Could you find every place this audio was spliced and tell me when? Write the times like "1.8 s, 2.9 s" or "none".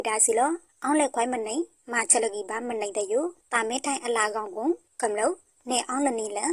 none